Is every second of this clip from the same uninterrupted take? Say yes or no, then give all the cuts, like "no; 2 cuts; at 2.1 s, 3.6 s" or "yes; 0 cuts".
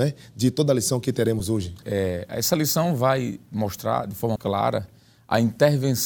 no; 2 cuts; at 1.8 s, 4.4 s